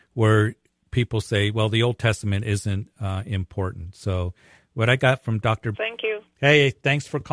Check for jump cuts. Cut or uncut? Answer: cut